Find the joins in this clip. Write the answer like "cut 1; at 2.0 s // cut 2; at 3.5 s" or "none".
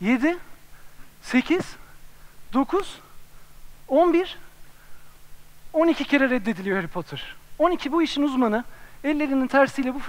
cut 1; at 3.9 s

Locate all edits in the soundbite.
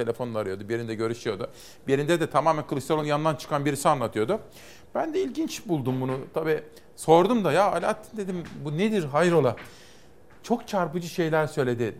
none

